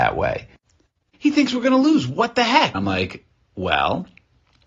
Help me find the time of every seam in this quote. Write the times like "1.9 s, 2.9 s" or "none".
1.1 s, 2.7 s